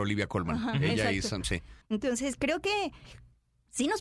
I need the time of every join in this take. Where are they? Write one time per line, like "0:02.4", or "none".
0:01.8